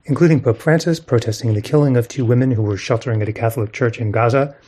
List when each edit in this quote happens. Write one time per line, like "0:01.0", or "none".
none